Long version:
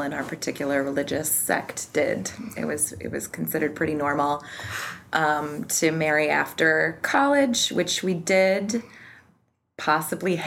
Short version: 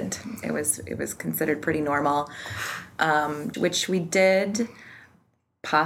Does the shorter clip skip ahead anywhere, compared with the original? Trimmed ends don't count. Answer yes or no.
yes